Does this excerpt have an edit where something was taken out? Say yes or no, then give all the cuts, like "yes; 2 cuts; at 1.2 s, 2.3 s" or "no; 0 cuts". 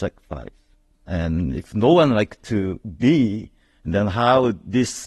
yes; 1 cut; at 0.9 s